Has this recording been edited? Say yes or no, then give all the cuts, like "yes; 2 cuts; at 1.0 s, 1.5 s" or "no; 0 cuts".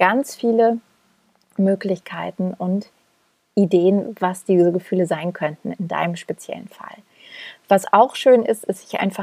no; 0 cuts